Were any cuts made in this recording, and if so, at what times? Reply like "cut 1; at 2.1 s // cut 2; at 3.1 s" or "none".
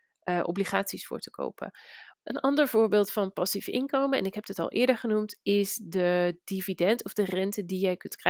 cut 1; at 2.1 s